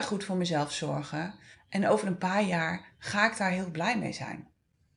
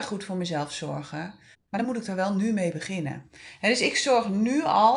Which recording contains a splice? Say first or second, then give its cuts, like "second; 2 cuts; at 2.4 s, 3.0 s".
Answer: second; 1 cut; at 1.5 s